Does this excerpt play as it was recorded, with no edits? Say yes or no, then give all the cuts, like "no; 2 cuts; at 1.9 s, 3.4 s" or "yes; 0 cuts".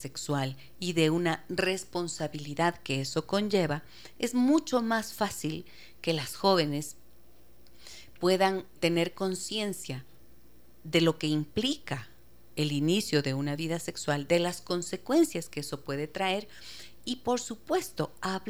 no; 1 cut; at 8.8 s